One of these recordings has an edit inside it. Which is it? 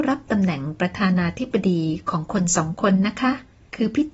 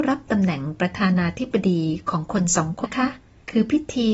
second; 1 cut; at 2.8 s

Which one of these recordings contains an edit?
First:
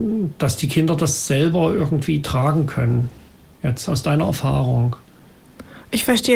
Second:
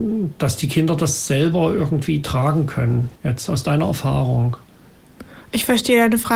second; 1 cut; at 3.2 s

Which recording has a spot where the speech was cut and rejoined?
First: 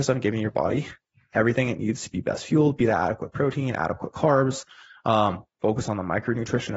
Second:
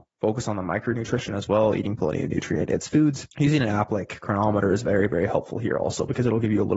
second; 1 cut; at 3.3 s

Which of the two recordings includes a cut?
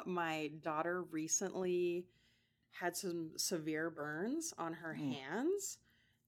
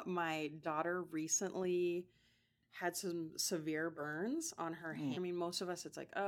second; 1 cut; at 5.1 s

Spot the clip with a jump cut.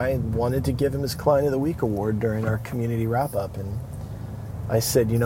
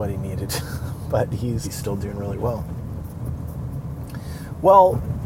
second; 1 cut; at 1.6 s

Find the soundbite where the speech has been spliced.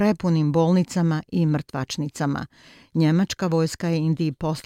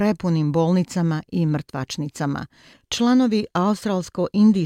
second; 1 cut; at 2.7 s

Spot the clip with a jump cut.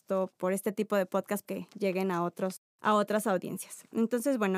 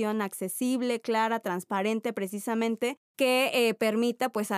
first; 1 cut; at 1.4 s

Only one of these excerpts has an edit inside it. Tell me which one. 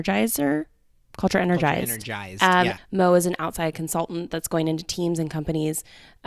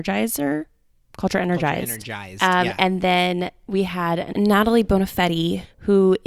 first; 1 cut; at 2.8 s

